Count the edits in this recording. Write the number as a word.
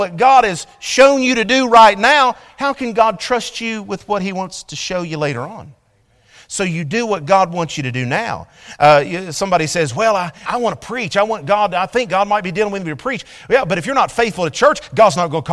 one